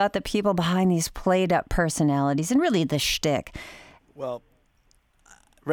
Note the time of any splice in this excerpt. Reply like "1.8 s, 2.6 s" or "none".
4.0 s